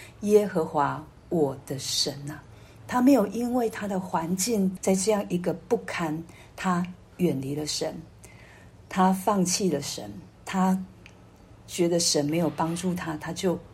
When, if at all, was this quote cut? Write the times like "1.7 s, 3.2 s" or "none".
4.8 s, 10.3 s

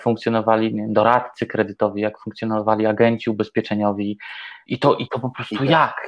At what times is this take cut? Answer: 4.7 s

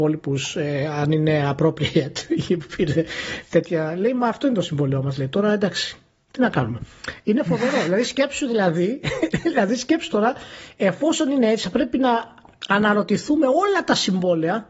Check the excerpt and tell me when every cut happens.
none

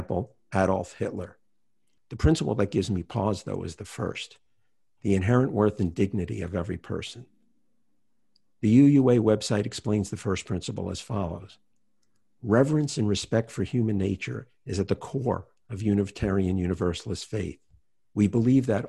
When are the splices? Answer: 2.0 s

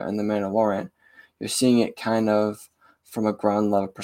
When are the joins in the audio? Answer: none

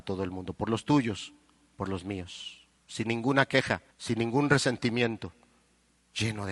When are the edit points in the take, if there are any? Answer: 2.8 s, 3.9 s

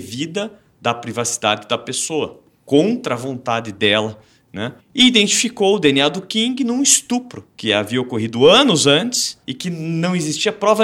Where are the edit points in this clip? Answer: 4.8 s, 7.5 s, 9.4 s

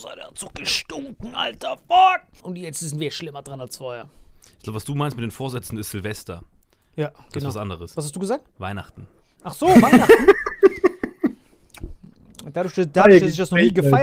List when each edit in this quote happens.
2.4 s

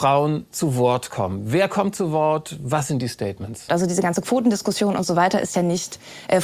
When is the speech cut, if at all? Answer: 3.7 s

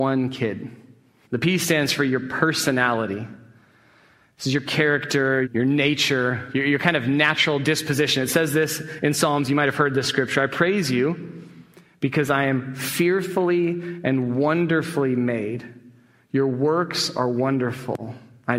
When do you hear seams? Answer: 1.2 s, 5.4 s

